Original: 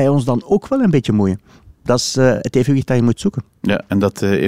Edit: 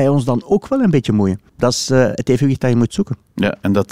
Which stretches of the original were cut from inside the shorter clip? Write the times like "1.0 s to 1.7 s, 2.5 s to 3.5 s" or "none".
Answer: 1.5 s to 1.8 s